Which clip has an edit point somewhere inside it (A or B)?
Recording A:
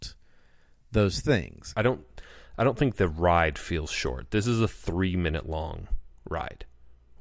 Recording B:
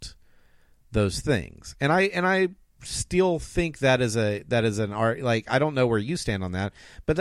A